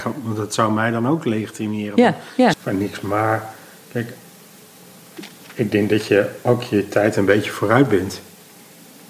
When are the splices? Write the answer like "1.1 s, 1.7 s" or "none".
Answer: 2.5 s